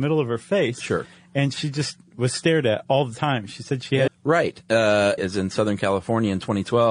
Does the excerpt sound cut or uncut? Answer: cut